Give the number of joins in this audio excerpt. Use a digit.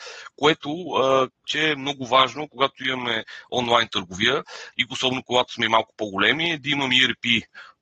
2